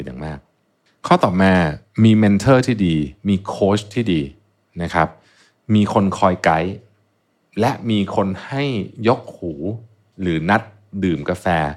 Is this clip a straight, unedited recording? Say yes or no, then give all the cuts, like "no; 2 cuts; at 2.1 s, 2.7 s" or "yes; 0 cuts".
yes; 0 cuts